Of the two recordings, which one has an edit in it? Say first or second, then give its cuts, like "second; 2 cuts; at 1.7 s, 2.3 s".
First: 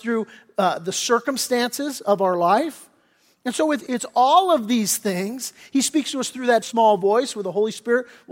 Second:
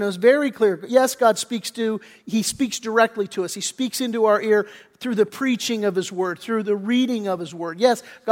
first; 2 cuts; at 3.9 s, 6.6 s